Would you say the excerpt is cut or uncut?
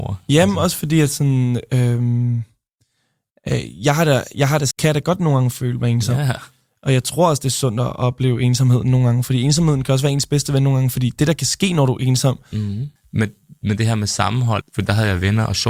cut